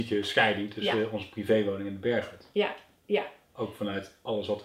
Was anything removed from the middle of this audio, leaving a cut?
no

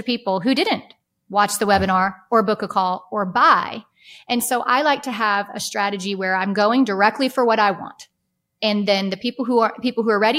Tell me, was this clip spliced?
no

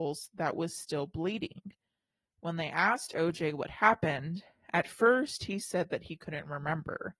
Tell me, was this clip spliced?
no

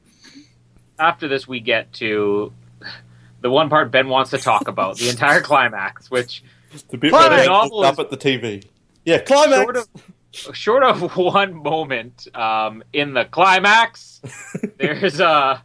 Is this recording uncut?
yes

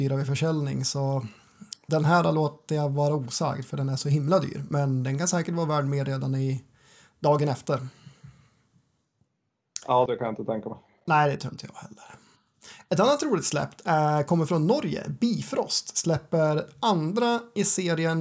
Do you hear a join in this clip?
yes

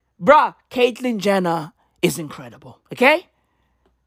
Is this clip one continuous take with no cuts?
no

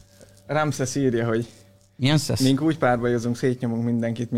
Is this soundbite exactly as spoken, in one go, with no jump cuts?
yes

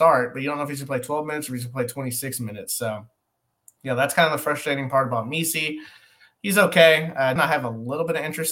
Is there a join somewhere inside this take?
yes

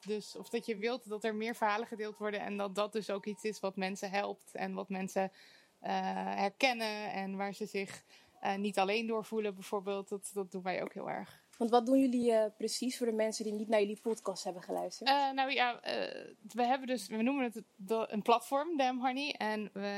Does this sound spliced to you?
no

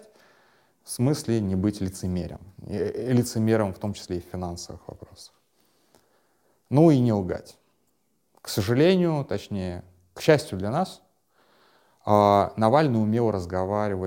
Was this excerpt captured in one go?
yes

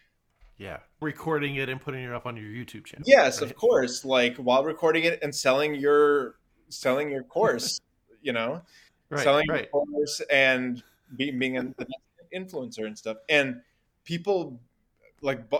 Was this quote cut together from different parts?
yes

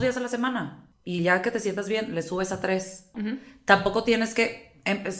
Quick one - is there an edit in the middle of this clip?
no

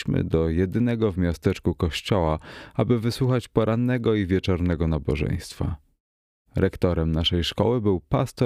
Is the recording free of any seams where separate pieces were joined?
yes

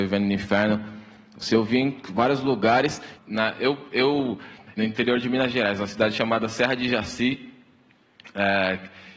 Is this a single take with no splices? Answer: no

